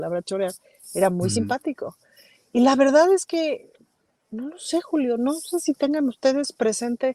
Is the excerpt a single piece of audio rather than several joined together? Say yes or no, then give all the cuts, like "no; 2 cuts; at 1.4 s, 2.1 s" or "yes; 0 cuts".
yes; 0 cuts